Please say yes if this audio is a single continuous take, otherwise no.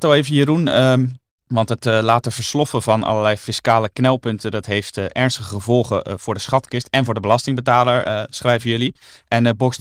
yes